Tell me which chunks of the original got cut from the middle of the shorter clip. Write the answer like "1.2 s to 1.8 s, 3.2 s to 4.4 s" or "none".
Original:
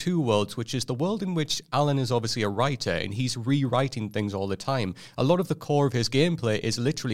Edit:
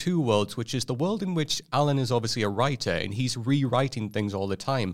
none